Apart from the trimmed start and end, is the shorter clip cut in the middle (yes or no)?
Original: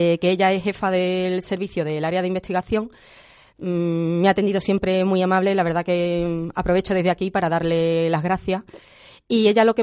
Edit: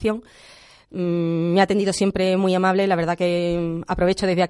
no